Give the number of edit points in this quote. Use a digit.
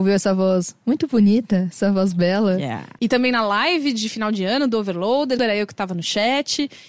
2